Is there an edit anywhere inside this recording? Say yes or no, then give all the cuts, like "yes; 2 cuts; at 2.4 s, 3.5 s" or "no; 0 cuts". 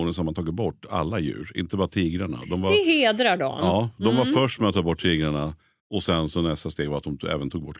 no; 0 cuts